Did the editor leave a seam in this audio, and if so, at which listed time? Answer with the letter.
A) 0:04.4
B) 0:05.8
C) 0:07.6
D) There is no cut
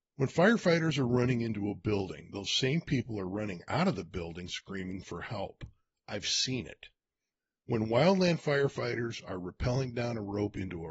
D